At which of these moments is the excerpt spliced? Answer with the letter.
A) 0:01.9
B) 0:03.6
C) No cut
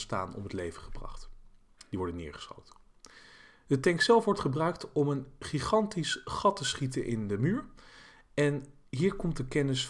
C